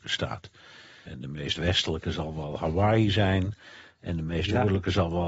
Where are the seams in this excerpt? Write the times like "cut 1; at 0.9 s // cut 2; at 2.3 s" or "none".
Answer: cut 1; at 1.1 s